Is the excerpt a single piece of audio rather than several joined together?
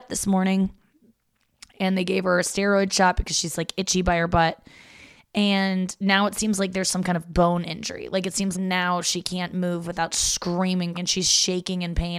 no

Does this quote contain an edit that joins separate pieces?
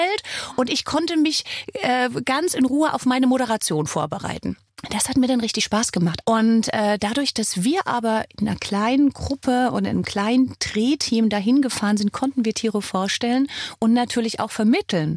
yes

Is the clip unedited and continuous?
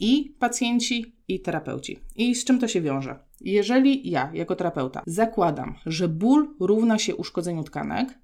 yes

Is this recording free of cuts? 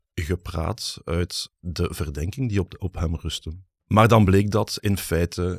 yes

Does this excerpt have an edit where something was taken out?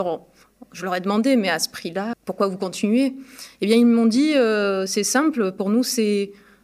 yes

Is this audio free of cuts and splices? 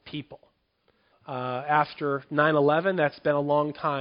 no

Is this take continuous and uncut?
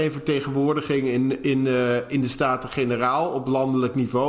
yes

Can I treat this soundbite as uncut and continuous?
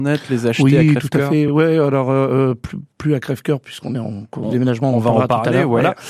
yes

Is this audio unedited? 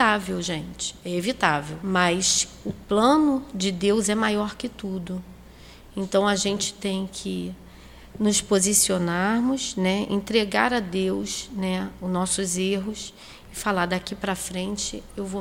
no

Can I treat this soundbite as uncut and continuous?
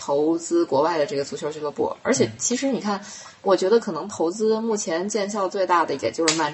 yes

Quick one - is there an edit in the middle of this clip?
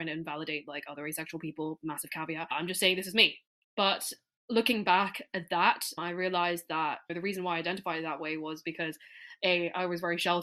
no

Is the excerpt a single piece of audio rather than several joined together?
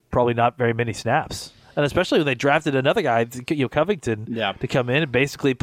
yes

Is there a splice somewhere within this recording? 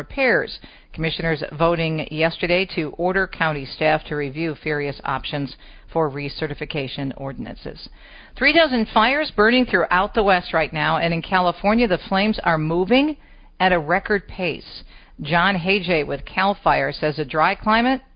no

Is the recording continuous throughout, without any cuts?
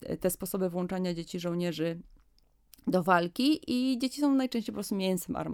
yes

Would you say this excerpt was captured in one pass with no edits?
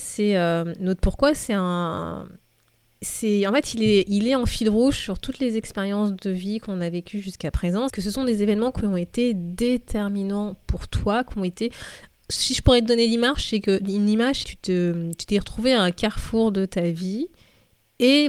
no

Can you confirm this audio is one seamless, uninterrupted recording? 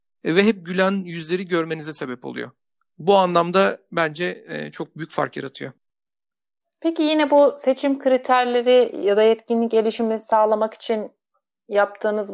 yes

